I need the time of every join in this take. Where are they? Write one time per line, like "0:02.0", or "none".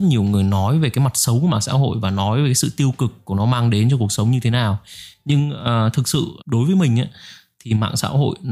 0:06.4